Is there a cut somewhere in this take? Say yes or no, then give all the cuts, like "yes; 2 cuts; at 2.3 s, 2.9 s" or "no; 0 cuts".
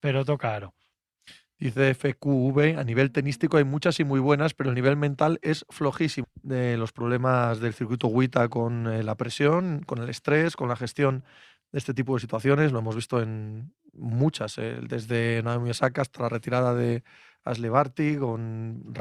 yes; 1 cut; at 6.2 s